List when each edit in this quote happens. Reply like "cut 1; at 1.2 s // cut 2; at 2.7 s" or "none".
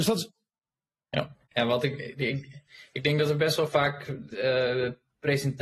cut 1; at 1.4 s